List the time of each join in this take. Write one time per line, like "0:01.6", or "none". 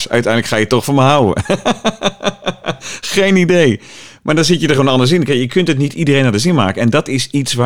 none